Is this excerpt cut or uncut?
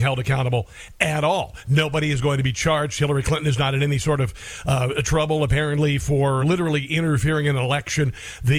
cut